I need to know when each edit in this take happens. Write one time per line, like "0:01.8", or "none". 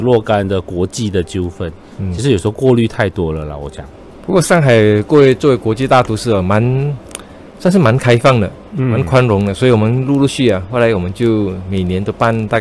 0:10.3